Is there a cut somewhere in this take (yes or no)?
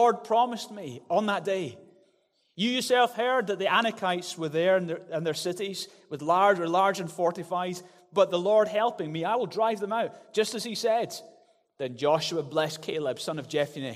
no